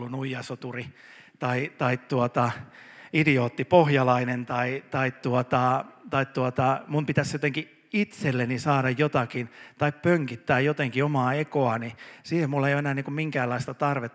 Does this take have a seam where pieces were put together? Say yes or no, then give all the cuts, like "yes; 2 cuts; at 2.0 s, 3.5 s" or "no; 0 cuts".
no; 0 cuts